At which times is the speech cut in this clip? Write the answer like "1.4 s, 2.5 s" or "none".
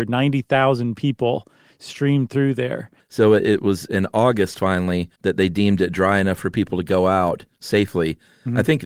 3.0 s, 5.1 s